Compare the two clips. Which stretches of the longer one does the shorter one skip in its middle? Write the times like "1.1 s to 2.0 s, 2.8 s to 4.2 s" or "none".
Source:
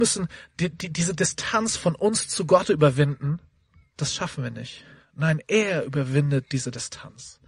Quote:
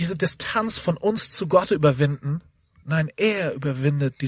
3.8 s to 5.1 s